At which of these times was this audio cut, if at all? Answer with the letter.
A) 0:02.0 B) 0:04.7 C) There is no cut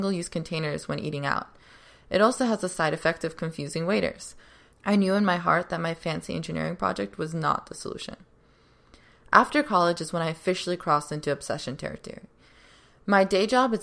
B